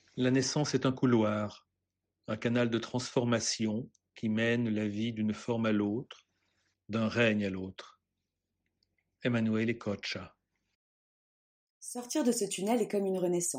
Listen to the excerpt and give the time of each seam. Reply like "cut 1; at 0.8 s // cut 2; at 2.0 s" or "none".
cut 1; at 6.7 s